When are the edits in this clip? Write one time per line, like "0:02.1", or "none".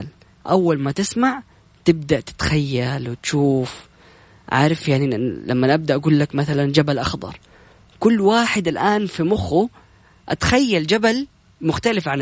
none